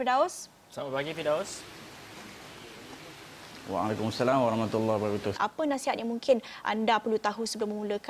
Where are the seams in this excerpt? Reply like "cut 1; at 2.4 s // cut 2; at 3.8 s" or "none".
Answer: cut 1; at 5.3 s // cut 2; at 6.6 s